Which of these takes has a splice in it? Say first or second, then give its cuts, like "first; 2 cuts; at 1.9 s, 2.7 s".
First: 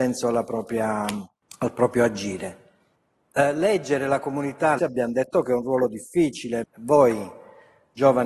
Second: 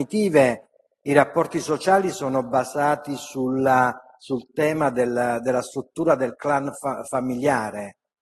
first; 3 cuts; at 3.3 s, 4.8 s, 6.6 s